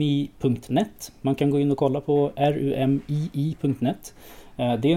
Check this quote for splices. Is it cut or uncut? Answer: uncut